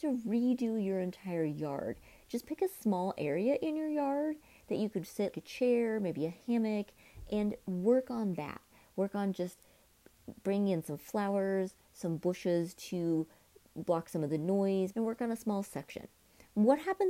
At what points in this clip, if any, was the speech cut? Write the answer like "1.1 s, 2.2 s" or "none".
5.3 s, 14.9 s